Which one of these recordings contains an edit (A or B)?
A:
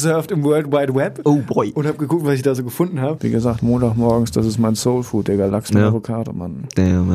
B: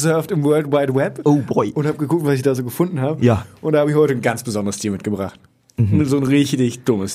A